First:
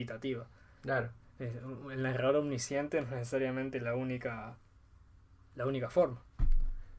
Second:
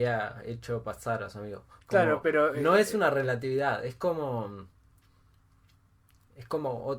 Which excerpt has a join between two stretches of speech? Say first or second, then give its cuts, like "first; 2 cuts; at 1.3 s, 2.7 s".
second; 1 cut; at 1.8 s